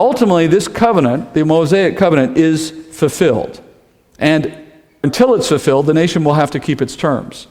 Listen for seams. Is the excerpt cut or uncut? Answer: uncut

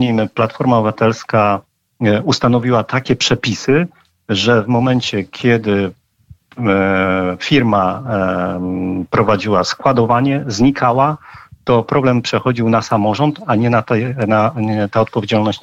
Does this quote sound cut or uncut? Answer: uncut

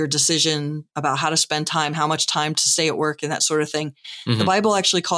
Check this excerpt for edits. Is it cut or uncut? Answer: uncut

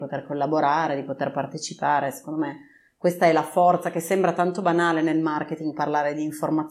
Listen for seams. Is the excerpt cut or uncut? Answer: uncut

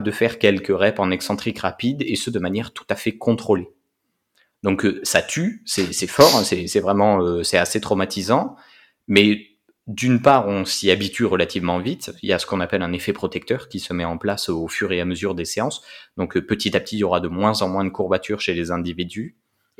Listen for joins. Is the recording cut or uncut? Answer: uncut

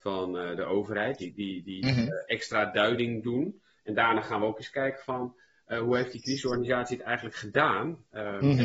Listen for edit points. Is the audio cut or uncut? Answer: cut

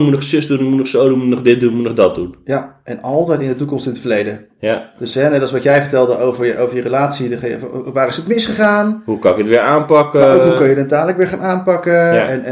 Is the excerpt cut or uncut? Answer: uncut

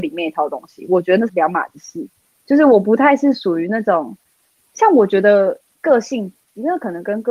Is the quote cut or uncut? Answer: cut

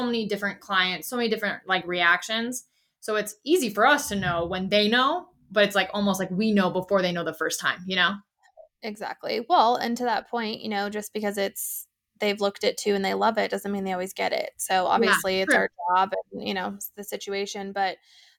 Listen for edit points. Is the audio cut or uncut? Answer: uncut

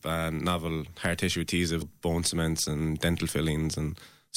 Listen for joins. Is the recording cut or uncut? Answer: cut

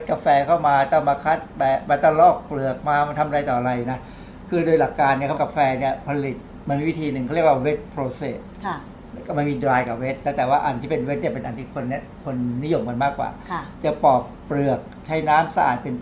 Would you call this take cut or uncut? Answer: cut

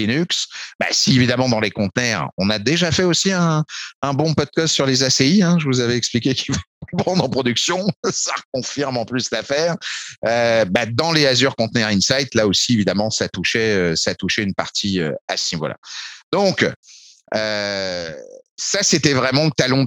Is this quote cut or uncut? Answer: uncut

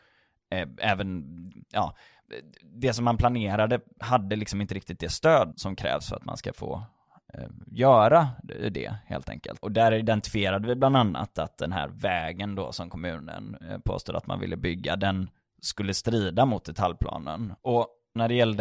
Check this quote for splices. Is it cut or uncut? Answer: cut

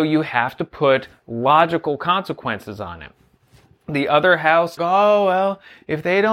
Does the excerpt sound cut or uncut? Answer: cut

